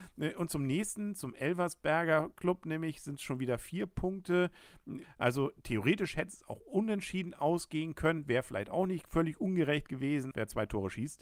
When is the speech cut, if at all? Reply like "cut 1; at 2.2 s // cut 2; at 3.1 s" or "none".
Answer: cut 1; at 5.0 s // cut 2; at 10.3 s